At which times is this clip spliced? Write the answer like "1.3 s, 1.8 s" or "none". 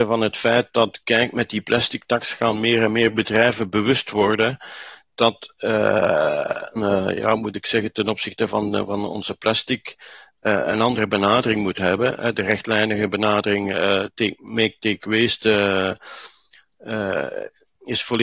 6.8 s